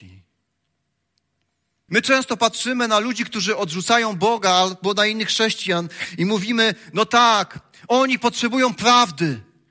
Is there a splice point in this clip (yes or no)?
yes